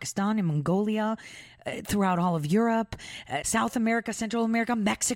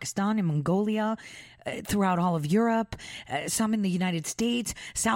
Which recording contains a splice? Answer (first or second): first